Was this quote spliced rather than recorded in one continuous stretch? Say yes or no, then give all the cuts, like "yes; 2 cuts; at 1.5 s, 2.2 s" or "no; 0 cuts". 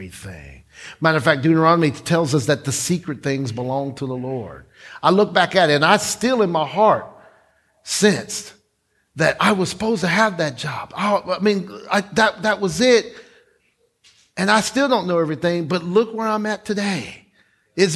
no; 0 cuts